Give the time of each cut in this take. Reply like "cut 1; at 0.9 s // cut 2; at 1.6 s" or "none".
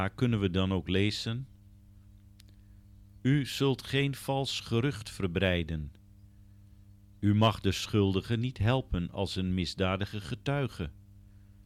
none